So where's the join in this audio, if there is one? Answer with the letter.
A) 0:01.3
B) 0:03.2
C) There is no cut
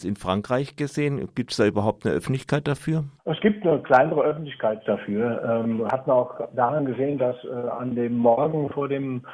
B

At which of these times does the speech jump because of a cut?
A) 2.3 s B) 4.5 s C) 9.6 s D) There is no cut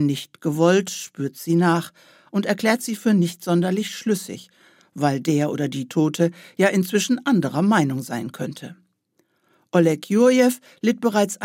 D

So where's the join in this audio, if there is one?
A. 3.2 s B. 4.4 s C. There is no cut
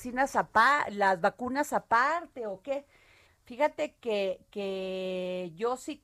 A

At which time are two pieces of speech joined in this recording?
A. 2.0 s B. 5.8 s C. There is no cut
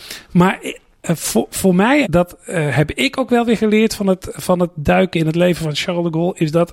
A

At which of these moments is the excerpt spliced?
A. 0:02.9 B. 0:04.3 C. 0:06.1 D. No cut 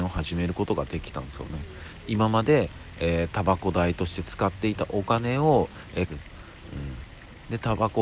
C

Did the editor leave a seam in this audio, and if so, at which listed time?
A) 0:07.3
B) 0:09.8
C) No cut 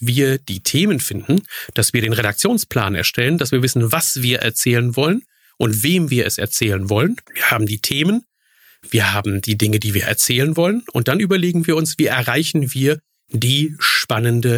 A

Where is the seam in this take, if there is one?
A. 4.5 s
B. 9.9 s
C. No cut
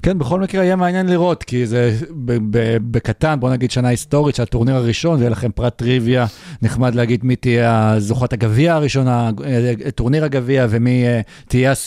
C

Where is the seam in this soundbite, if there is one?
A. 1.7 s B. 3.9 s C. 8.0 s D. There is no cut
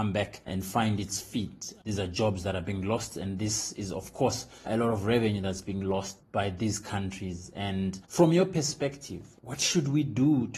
C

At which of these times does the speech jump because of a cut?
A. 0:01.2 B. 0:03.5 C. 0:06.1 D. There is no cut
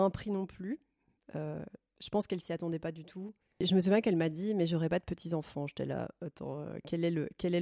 D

